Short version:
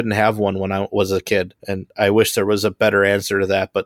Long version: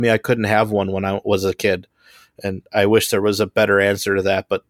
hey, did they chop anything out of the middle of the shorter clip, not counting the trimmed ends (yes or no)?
yes